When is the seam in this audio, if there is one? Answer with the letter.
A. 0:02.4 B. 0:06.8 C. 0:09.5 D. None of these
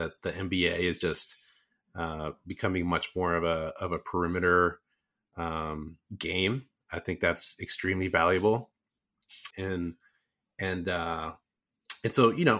C